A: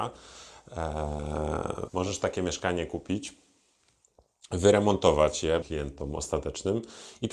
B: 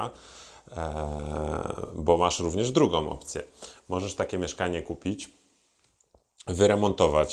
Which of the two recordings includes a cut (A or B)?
A